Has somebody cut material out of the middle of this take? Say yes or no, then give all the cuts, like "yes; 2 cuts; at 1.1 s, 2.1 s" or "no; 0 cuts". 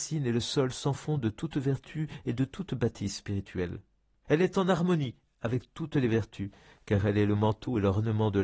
yes; 1 cut; at 4.2 s